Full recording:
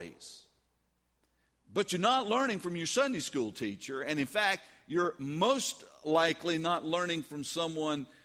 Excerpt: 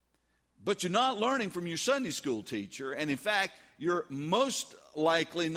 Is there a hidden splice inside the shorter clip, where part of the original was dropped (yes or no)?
no